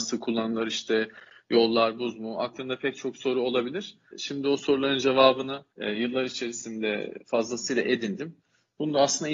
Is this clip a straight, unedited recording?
no; 2 cuts; at 4.1 s, 5.7 s

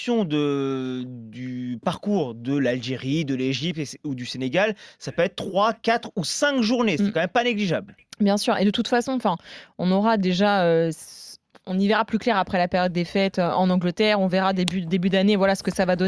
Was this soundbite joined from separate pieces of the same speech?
no; 0 cuts

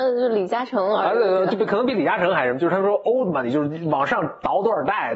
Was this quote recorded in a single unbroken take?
yes; 0 cuts

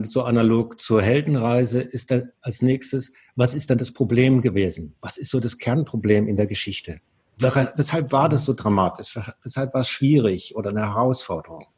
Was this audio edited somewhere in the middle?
no; 0 cuts

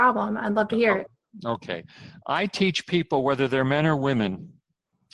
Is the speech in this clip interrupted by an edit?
no; 0 cuts

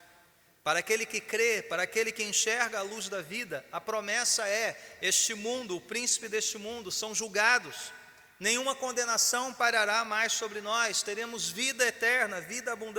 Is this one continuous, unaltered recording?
yes; 0 cuts

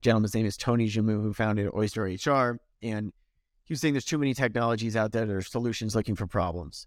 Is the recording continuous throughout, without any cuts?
yes; 0 cuts

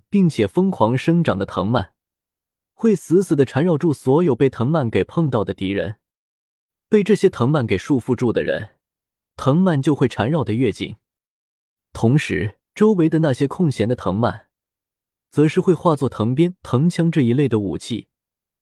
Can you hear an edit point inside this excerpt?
yes; 3 cuts; at 9.2 s, 12.7 s, 16.6 s

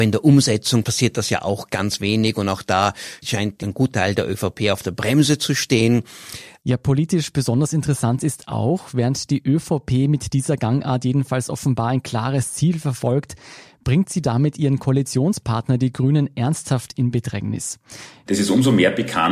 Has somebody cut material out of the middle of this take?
yes; 2 cuts; at 6.6 s, 18.3 s

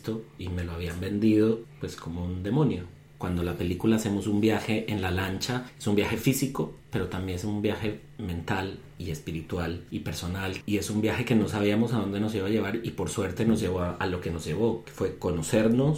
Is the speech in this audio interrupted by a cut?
no; 0 cuts

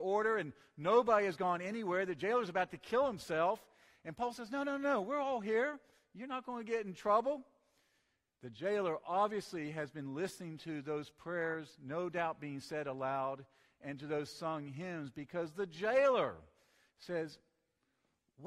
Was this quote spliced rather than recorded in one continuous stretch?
no; 0 cuts

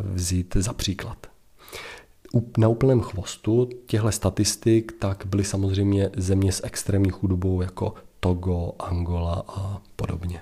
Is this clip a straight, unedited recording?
yes; 0 cuts

